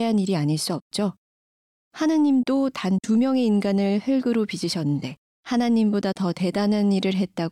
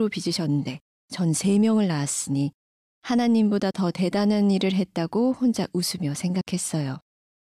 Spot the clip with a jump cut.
first; 1 cut; at 5.2 s

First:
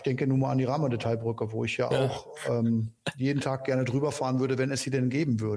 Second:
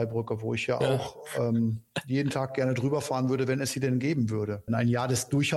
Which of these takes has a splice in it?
second; 1 cut; at 4.7 s

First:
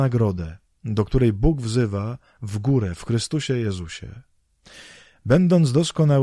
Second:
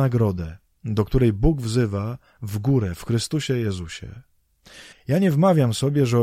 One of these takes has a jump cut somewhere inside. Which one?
second; 1 cut; at 4.9 s

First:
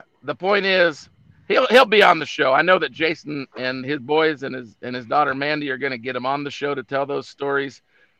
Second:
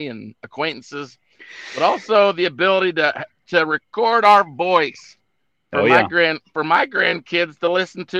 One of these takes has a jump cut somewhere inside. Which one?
first; 1 cut; at 3.8 s

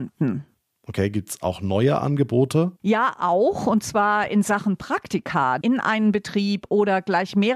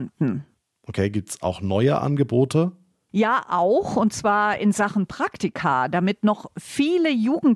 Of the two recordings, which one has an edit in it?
first; 2 cuts; at 2.8 s, 5.6 s

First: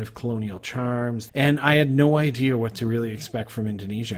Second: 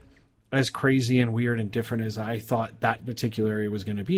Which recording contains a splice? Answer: first; 1 cut; at 1.3 s

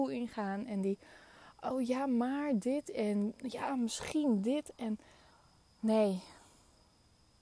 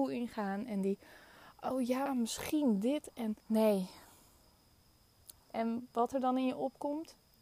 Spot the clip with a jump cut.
second; 3 cuts; at 2.1 s, 3.4 s, 5.4 s

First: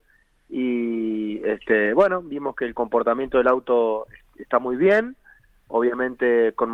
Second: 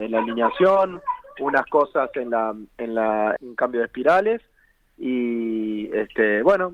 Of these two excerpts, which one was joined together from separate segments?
second; 1 cut; at 3.4 s

